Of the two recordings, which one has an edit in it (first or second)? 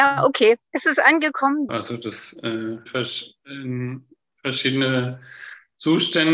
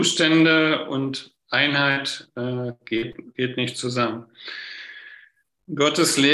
first